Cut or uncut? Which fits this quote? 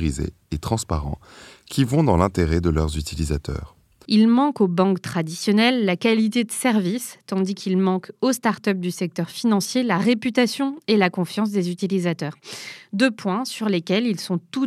cut